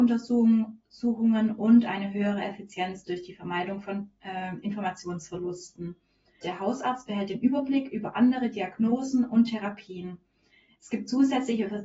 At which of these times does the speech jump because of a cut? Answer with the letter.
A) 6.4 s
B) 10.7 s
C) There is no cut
A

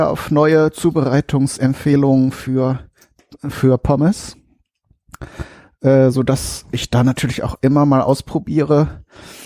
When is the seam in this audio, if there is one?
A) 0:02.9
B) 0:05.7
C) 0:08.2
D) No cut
D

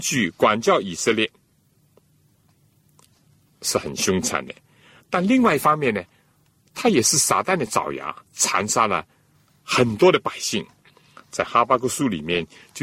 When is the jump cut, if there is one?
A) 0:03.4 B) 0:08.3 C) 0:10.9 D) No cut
B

